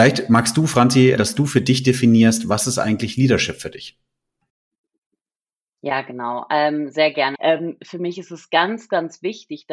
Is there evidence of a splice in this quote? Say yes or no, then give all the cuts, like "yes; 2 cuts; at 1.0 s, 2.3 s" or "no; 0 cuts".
yes; 2 cuts; at 1.2 s, 7.3 s